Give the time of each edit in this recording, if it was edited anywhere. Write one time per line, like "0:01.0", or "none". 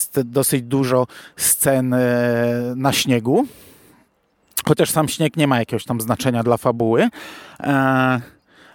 none